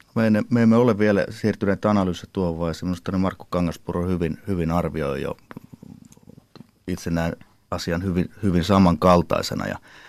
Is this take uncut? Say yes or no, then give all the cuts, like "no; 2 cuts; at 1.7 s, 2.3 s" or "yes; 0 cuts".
yes; 0 cuts